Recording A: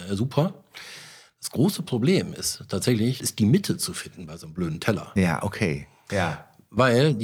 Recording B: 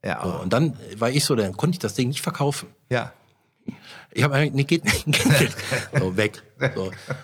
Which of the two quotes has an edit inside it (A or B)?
A